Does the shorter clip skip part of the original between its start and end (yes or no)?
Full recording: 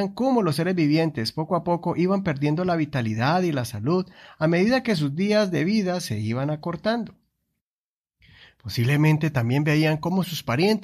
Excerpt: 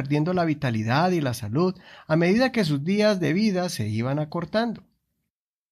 no